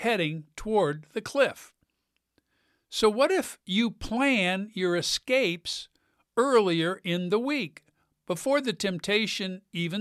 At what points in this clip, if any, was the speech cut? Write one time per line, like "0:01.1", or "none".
none